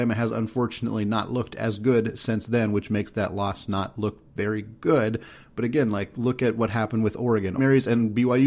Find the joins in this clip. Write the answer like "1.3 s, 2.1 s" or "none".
7.6 s